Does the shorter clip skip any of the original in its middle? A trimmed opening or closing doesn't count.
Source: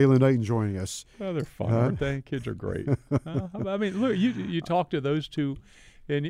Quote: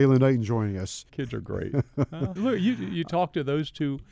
yes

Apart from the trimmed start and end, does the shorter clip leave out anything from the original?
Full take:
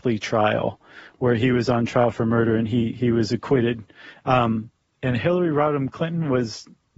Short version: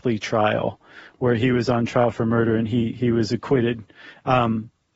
no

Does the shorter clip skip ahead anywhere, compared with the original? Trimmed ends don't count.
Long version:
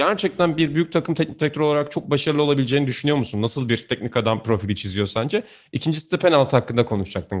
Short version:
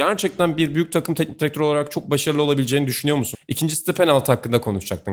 yes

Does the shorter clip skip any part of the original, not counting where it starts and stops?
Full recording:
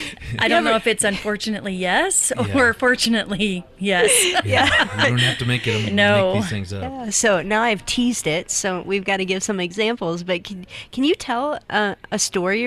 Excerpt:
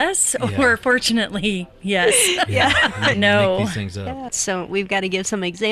yes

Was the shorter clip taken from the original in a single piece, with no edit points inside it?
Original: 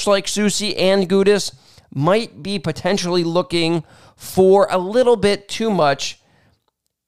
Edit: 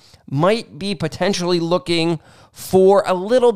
yes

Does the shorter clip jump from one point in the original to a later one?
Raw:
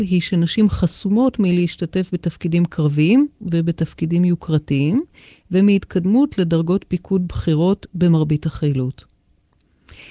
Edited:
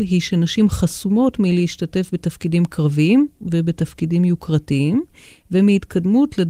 no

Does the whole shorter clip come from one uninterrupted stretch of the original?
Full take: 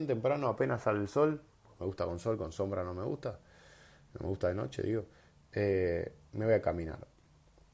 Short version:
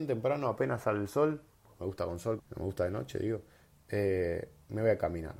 no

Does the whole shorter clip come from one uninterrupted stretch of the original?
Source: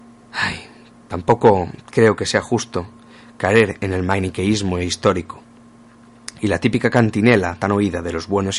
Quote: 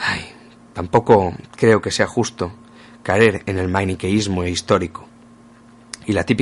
yes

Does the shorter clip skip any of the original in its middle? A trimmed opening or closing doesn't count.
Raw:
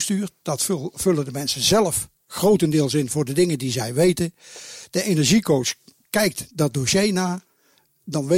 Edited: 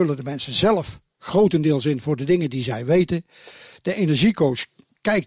no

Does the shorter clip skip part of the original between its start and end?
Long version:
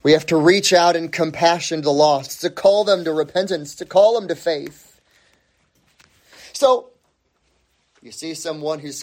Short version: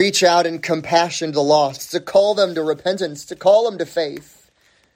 no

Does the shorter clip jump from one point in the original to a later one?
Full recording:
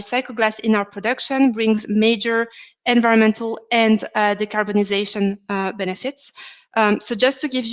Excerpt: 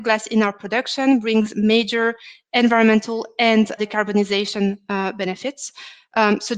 yes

